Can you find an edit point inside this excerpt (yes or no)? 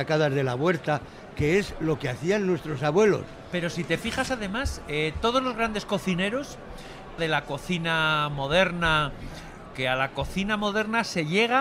yes